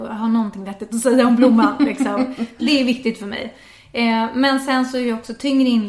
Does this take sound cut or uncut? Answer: uncut